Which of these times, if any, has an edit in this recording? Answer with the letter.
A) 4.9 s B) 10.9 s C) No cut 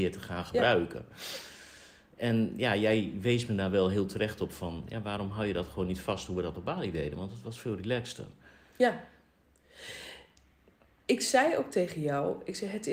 C